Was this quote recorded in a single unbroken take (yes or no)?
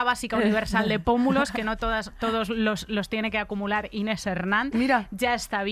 yes